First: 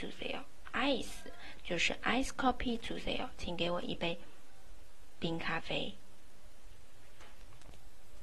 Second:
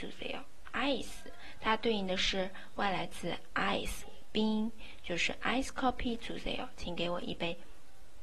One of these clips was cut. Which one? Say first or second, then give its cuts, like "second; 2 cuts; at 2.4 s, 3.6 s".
first; 1 cut; at 1.6 s